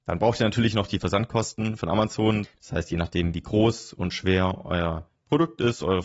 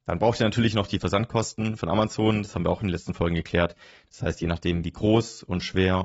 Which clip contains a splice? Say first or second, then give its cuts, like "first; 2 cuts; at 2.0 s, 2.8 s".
first; 1 cut; at 2.4 s